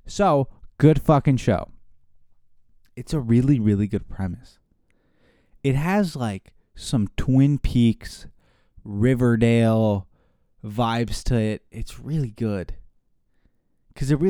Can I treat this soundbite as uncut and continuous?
yes; 0 cuts

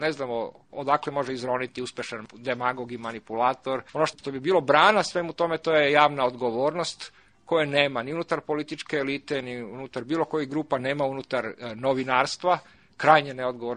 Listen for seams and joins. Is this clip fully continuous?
no; 1 cut; at 3.9 s

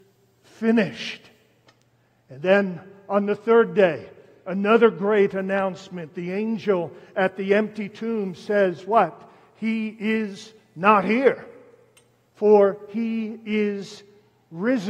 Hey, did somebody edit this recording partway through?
no; 0 cuts

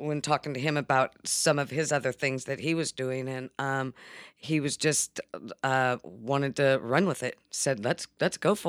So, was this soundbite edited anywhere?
no; 0 cuts

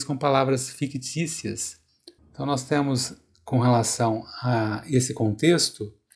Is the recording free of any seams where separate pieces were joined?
no; 1 cut; at 2.2 s

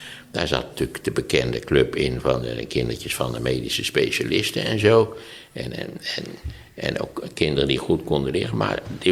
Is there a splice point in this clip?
no; 0 cuts

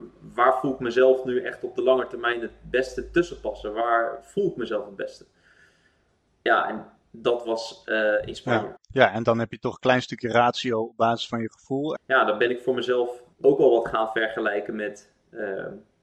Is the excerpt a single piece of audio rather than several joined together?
no; 3 cuts; at 8.8 s, 12.0 s, 13.3 s

